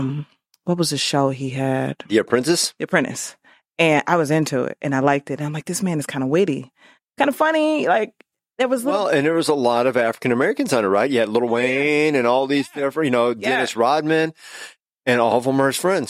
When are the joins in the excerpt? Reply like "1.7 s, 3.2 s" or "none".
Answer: 2.0 s